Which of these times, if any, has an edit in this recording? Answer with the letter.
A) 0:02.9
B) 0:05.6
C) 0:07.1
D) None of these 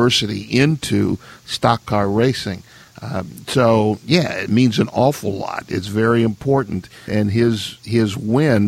C